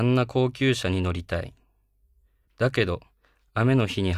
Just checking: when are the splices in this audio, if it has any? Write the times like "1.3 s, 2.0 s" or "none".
2.5 s